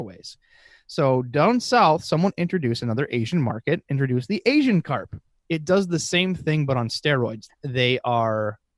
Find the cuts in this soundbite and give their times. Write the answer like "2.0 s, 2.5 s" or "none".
7.5 s

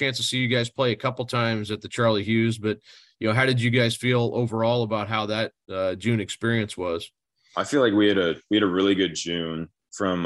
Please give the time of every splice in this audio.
none

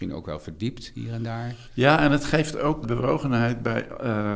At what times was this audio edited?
2.8 s

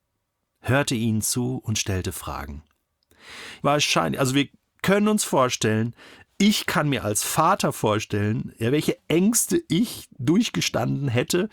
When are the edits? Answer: 3.6 s

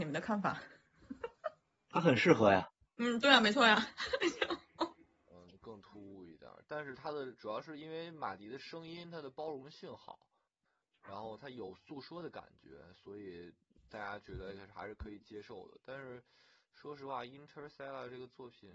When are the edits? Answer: 2.9 s

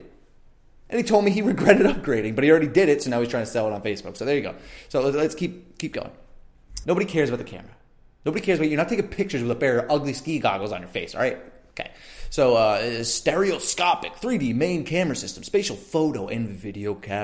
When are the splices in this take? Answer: 6.8 s

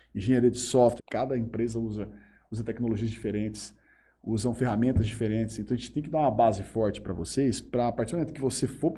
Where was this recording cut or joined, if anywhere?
1.0 s

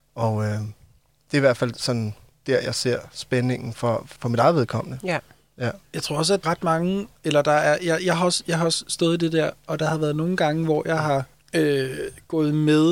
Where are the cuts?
6.4 s

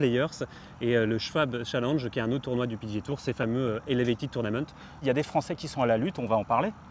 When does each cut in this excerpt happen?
5.0 s

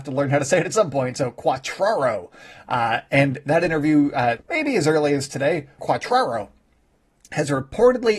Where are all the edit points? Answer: 4.4 s, 5.8 s

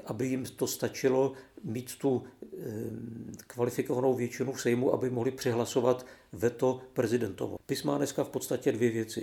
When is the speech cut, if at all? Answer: 7.6 s

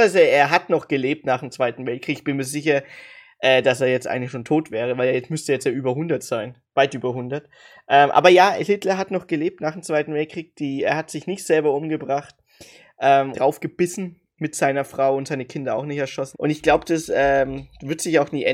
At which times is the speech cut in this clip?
13.3 s, 16.3 s

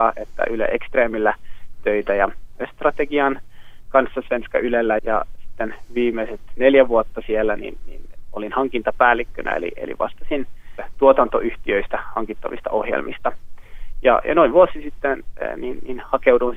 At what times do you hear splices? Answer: 5.0 s

